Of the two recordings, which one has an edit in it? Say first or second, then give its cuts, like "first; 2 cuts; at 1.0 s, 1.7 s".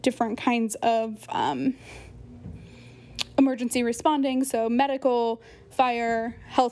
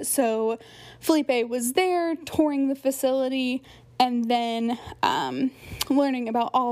first; 1 cut; at 5.7 s